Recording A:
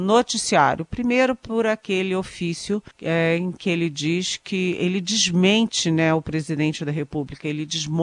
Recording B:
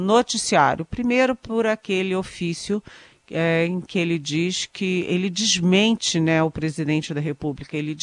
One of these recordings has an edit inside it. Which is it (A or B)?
A